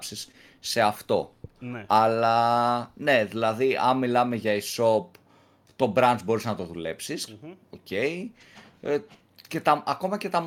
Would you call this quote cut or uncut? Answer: cut